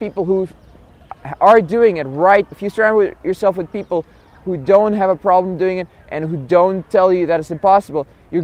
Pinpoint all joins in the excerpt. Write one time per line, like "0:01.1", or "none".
0:02.5